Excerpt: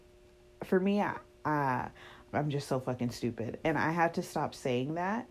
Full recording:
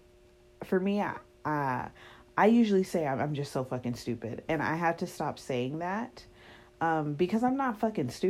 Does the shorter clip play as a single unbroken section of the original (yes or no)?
no